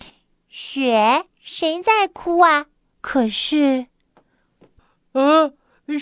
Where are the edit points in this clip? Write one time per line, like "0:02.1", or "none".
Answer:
0:01.3
0:02.9